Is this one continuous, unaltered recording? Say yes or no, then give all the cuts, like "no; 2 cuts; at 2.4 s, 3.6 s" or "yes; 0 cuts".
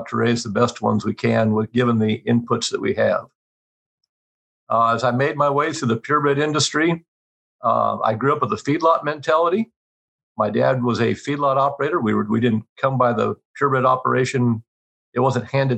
yes; 0 cuts